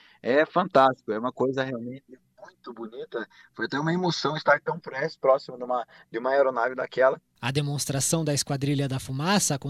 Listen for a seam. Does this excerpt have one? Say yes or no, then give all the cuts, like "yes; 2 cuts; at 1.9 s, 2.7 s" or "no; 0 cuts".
yes; 1 cut; at 7.4 s